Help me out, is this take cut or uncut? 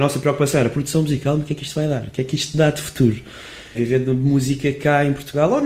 cut